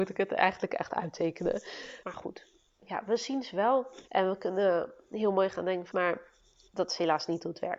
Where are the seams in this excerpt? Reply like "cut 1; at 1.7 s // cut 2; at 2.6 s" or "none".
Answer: cut 1; at 2.0 s // cut 2; at 4.1 s // cut 3; at 5.9 s